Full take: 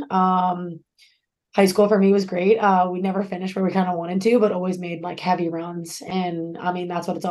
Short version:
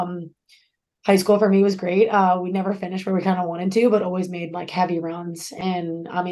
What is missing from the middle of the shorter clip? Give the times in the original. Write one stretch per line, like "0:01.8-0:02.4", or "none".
none